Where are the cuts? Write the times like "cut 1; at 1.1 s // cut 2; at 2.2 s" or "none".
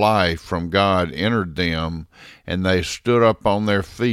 none

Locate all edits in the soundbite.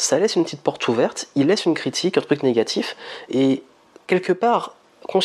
none

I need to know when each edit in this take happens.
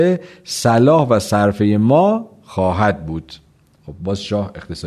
none

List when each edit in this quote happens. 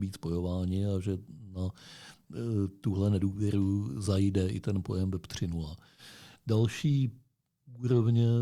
none

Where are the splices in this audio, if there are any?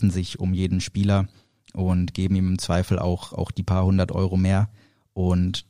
none

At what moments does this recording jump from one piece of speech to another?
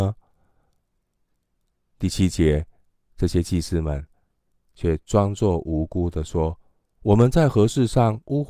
none

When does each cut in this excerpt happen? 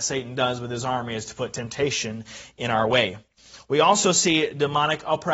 none

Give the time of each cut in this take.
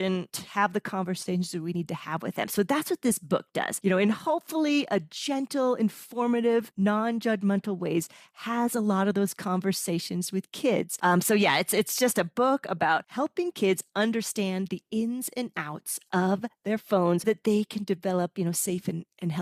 cut 1; at 11.0 s // cut 2; at 17.2 s

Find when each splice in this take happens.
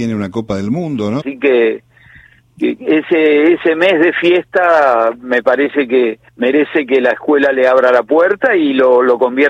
cut 1; at 1.2 s // cut 2; at 6.3 s

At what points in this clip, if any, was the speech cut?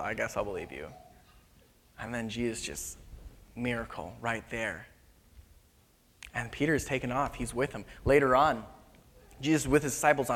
none

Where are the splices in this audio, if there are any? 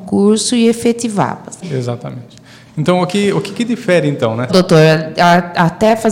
cut 1; at 1.6 s // cut 2; at 4.5 s

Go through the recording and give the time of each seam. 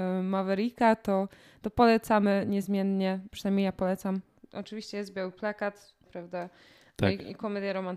cut 1; at 4.4 s // cut 2; at 6.1 s

